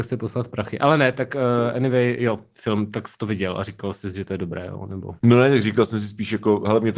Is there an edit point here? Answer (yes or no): yes